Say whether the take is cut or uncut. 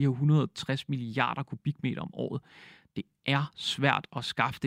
uncut